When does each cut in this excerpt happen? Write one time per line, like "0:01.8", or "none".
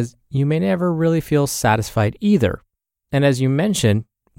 none

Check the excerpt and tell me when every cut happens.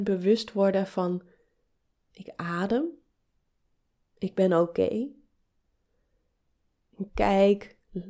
0:02.0
0:07.1

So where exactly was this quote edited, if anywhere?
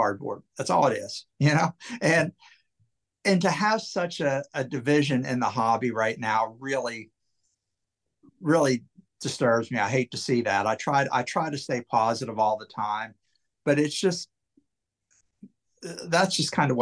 none

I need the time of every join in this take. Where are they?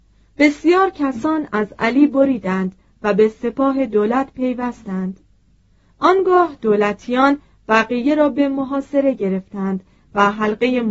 none

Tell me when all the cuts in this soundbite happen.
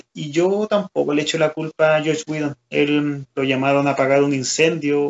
none

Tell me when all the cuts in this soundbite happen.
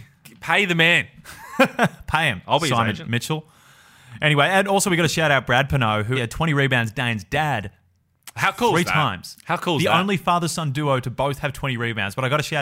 0:06.1

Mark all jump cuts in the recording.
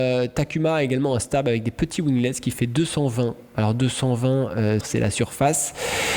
0:04.8

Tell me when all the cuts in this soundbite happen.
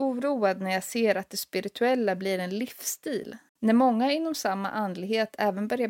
0:03.5

